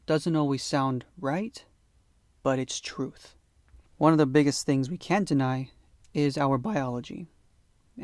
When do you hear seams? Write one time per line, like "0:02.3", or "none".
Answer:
0:03.9

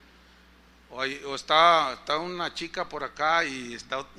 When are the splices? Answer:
none

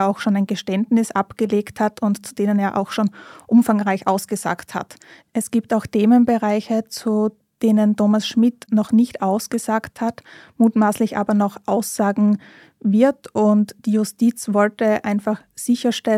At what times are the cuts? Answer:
none

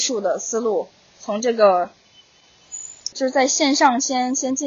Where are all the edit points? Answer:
0:03.1

